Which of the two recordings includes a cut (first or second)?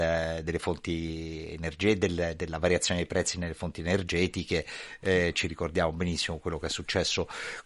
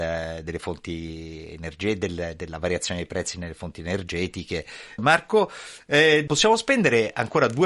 second